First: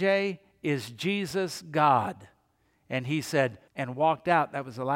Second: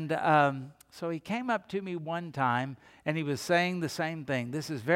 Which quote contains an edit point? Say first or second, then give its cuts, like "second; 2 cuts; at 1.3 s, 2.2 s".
first; 1 cut; at 3.7 s